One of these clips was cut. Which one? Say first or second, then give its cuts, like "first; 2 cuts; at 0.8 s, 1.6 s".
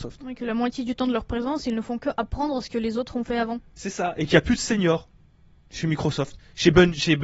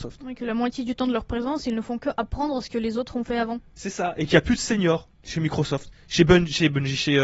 second; 1 cut; at 5.1 s